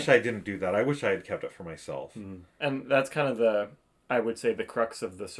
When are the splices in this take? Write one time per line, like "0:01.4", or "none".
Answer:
0:02.5